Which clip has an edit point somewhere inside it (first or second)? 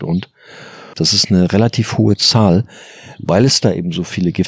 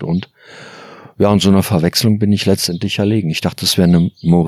first